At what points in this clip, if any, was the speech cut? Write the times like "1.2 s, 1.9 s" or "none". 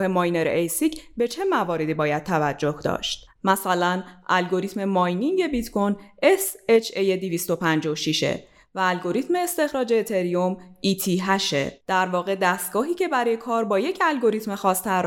3.4 s